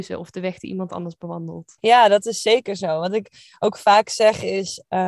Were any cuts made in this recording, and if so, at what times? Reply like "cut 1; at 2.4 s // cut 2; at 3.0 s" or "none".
cut 1; at 1.8 s